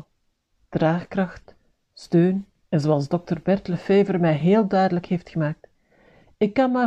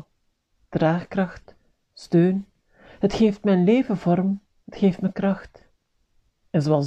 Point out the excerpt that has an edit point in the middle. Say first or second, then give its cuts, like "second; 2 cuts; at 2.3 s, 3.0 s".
first; 1 cut; at 2.6 s